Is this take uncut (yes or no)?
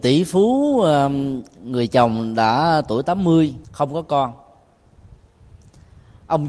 no